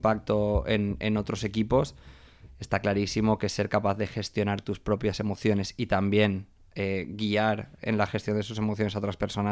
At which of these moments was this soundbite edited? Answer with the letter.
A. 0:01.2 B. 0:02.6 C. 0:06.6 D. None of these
D